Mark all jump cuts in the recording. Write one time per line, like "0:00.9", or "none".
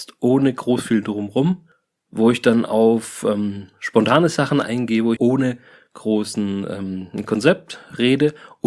0:05.2